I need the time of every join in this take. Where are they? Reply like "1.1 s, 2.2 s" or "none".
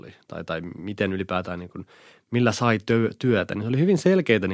none